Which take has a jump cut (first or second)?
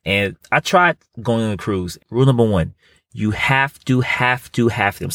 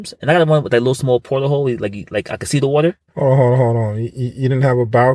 first